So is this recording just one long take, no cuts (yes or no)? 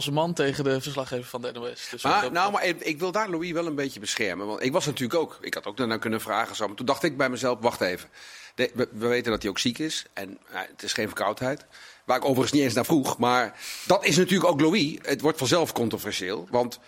no